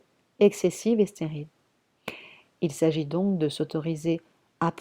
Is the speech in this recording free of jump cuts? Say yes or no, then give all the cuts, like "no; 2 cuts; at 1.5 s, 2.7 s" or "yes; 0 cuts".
yes; 0 cuts